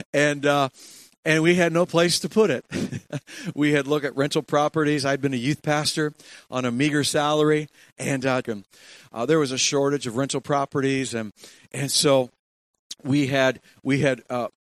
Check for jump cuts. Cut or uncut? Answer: cut